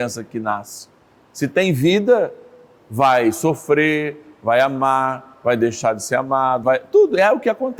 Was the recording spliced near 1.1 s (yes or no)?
no